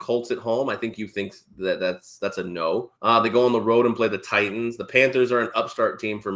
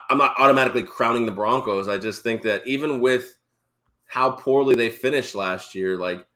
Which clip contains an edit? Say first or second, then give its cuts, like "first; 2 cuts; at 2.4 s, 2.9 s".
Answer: first; 1 cut; at 3.0 s